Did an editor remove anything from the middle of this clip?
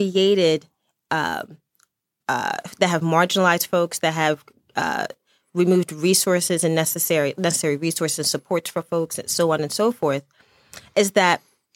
no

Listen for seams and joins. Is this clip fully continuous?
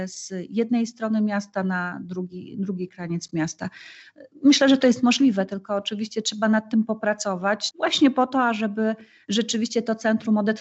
no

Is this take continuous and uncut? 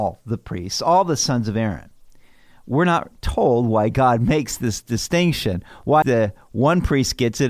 no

